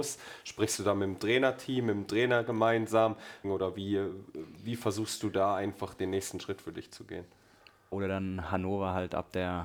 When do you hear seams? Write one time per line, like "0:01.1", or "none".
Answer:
0:03.4
0:07.9